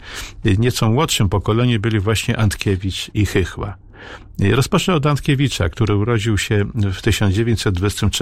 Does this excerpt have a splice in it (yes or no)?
yes